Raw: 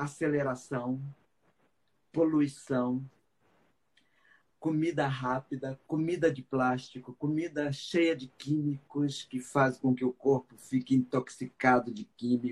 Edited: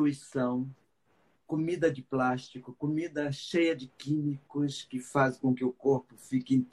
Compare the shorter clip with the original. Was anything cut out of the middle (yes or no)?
yes